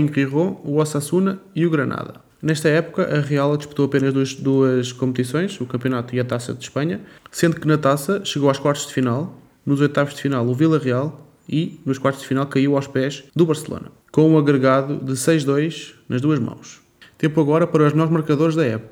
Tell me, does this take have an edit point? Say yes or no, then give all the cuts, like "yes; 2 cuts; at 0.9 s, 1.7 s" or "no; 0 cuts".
yes; 2 cuts; at 9.5 s, 13.3 s